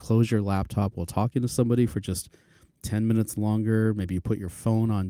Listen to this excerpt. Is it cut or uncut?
uncut